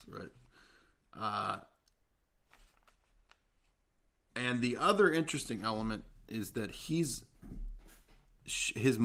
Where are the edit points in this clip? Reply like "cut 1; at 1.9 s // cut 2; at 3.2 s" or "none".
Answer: none